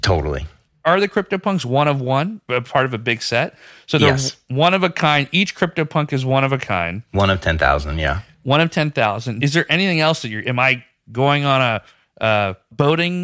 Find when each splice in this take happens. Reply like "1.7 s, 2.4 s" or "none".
none